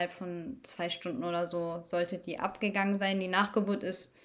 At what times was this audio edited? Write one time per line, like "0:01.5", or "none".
none